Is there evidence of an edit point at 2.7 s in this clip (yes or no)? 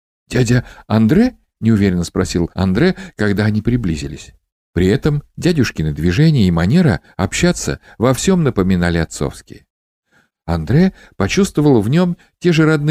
no